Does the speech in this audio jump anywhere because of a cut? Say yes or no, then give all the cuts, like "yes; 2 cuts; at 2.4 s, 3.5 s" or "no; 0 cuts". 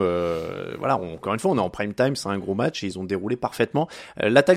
no; 0 cuts